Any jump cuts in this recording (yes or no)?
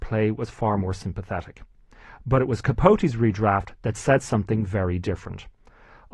no